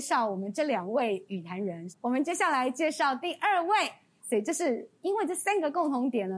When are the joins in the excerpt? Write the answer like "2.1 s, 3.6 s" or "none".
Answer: 1.9 s, 4.2 s